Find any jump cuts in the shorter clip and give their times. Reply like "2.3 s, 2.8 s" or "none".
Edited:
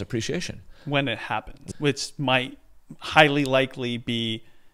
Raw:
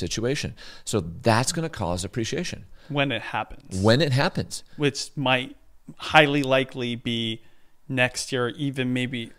1.7 s